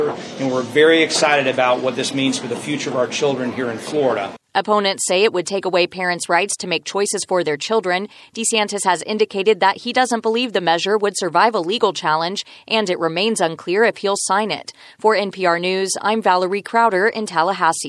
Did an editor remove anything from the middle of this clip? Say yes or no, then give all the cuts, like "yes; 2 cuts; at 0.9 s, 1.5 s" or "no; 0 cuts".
no; 0 cuts